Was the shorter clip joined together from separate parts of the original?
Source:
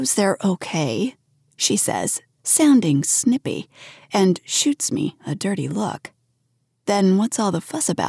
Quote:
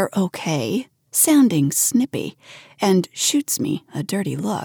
yes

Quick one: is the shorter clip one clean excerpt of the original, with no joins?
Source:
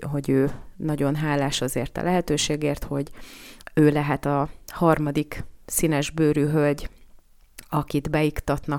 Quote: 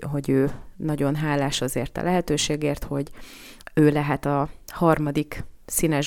yes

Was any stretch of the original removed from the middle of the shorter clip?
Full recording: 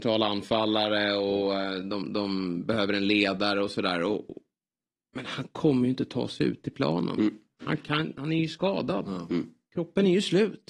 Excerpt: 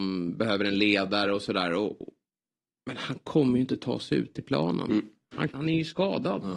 yes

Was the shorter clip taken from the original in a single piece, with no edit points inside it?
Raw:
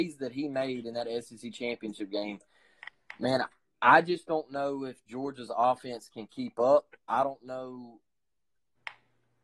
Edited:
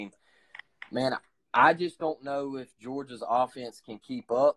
yes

